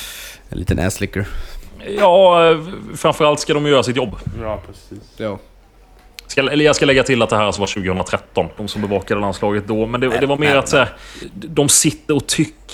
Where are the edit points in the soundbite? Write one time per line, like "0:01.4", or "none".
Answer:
0:08.6